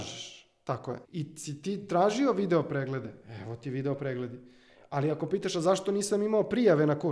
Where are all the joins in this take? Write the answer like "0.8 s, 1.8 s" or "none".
1.0 s